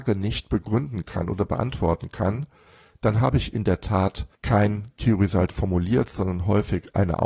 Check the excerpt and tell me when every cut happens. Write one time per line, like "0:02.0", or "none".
0:04.4